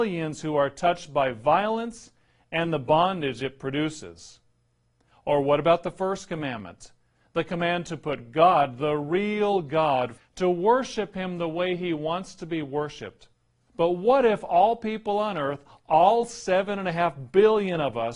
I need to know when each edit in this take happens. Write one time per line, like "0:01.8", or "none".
0:10.1
0:13.7